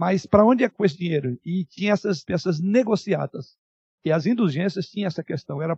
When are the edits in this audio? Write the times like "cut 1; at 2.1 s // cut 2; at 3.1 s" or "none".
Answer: cut 1; at 2.3 s // cut 2; at 3.9 s